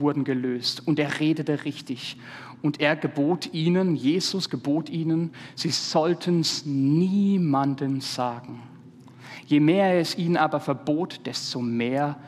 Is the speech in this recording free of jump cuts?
yes; 0 cuts

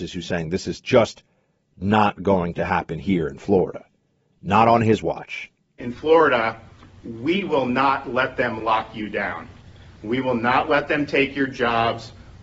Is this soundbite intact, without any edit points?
yes; 0 cuts

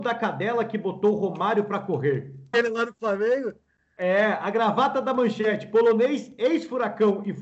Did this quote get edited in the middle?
yes; 1 cut; at 2.5 s

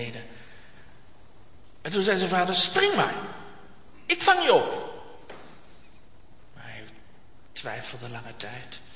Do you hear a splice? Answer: no; 0 cuts

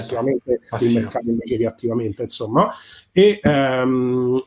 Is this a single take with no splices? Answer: yes; 0 cuts

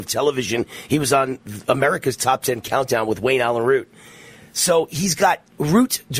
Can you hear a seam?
no; 0 cuts

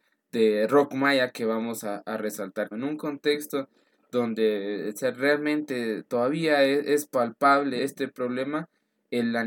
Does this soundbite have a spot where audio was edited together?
yes; 2 cuts; at 2.7 s, 7.8 s

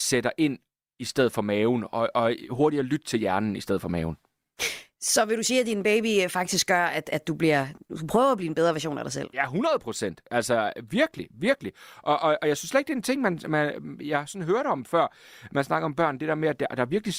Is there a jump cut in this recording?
no; 0 cuts

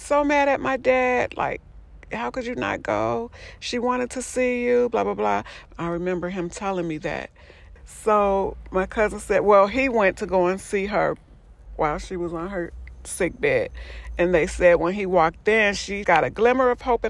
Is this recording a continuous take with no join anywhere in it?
no; 3 cuts; at 5.7 s, 7.8 s, 16.0 s

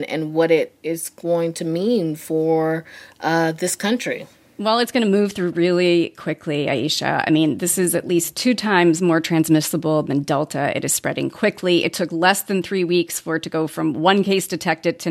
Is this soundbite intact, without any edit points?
yes; 0 cuts

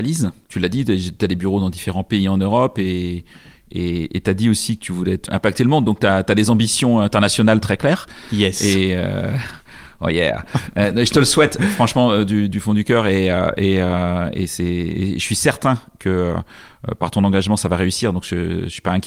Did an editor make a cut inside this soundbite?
yes; 1 cut; at 5.3 s

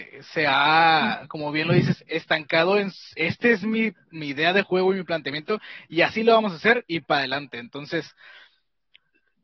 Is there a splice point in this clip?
no; 0 cuts

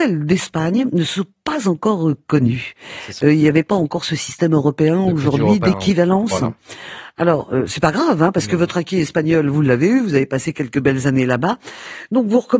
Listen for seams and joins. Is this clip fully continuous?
yes; 0 cuts

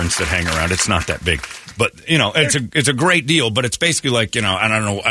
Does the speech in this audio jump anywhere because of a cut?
no; 0 cuts

